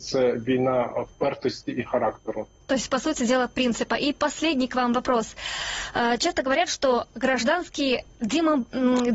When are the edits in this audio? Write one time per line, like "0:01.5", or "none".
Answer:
0:02.6